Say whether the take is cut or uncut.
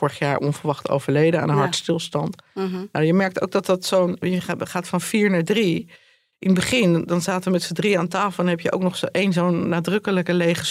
cut